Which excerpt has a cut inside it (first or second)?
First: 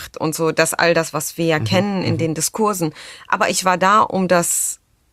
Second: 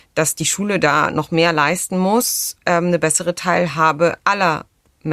second